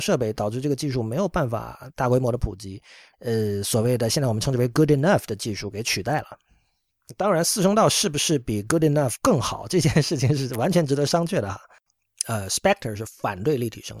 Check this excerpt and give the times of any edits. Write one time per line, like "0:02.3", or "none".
0:03.1